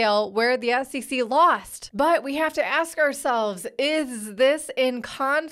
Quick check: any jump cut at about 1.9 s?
yes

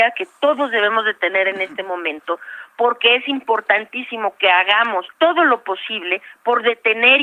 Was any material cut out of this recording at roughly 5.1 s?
yes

